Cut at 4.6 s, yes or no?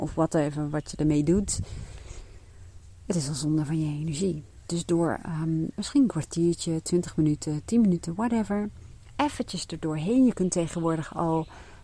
no